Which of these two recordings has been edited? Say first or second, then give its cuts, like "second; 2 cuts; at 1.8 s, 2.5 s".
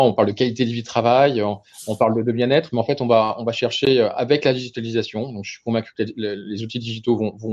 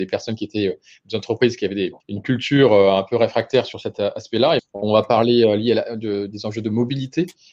second; 2 cuts; at 2.0 s, 4.6 s